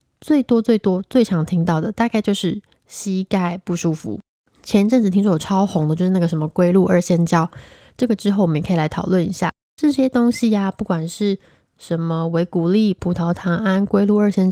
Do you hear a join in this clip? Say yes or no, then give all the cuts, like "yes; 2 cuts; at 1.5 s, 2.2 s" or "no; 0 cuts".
no; 0 cuts